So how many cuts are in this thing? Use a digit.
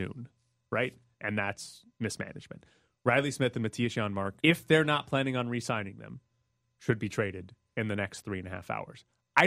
2